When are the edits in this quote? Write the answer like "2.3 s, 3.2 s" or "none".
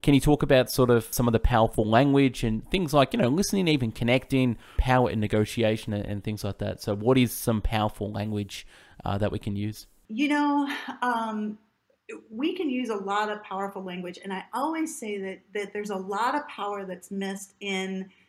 4.8 s